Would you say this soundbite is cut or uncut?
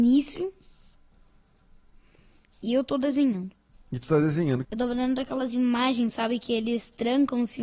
cut